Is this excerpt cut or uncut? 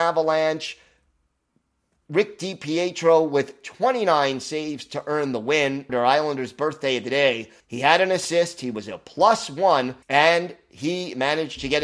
cut